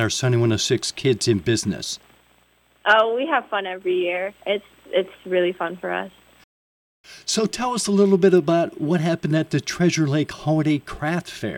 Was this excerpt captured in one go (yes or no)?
yes